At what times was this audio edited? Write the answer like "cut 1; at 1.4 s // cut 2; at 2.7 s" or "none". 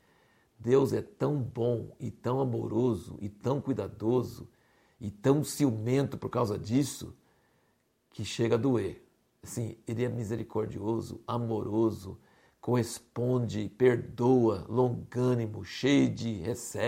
none